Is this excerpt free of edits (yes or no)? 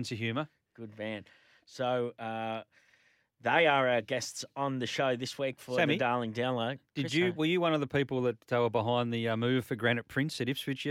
yes